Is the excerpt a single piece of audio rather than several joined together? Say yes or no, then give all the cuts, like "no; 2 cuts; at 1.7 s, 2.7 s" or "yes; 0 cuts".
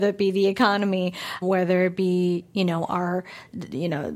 no; 1 cut; at 1.4 s